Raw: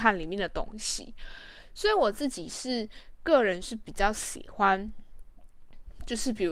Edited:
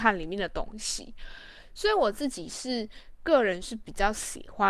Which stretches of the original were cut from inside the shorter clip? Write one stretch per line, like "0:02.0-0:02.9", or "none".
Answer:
none